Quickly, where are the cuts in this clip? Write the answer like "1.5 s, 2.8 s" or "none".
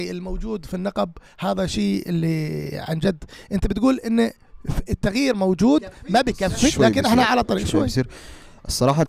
6.7 s, 7.7 s